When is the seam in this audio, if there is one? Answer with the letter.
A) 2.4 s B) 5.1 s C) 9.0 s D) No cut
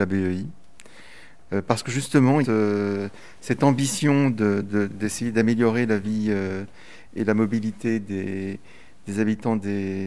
A